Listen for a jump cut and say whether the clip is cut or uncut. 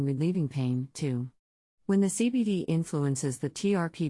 uncut